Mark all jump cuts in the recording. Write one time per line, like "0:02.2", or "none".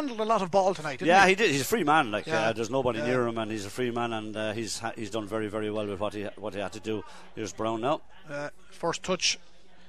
none